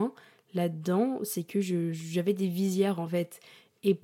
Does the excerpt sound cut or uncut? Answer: uncut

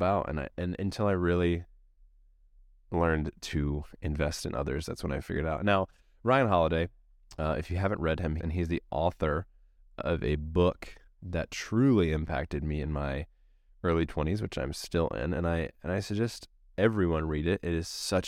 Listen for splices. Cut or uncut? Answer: cut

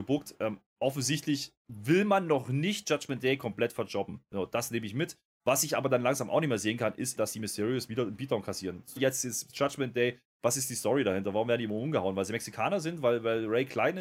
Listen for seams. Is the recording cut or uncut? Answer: cut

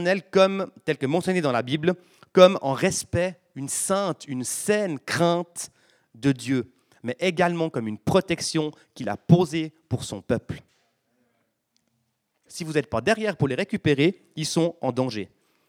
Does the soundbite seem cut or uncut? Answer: cut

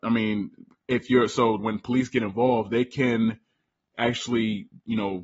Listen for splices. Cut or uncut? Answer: cut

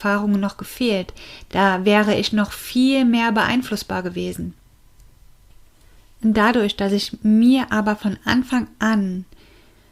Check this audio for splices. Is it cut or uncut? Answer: uncut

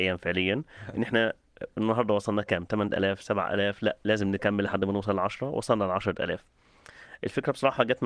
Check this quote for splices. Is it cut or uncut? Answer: uncut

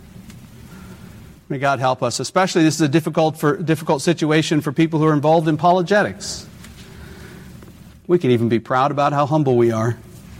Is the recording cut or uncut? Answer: cut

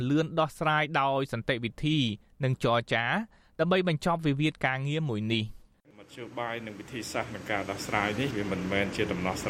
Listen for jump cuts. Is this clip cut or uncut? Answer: uncut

